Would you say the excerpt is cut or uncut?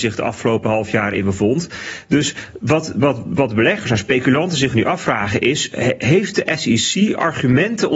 uncut